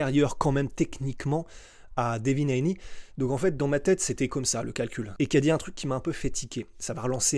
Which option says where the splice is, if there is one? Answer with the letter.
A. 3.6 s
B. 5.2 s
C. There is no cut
B